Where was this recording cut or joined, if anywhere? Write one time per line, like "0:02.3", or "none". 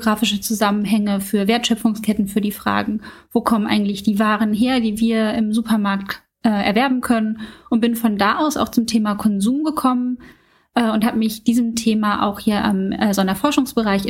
none